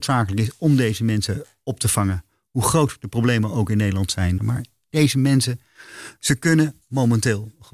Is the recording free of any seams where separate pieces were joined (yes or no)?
no